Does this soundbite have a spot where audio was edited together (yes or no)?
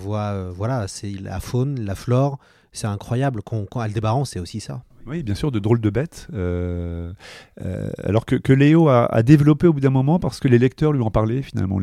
no